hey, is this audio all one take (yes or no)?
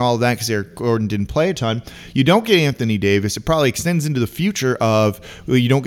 yes